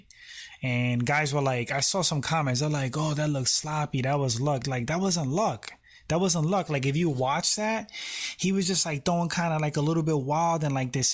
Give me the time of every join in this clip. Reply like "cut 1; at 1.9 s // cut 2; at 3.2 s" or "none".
none